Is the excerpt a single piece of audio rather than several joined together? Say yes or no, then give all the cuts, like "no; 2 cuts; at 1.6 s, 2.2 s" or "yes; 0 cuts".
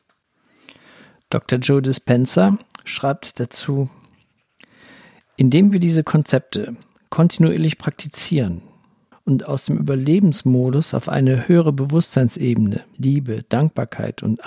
no; 2 cuts; at 9.1 s, 12.9 s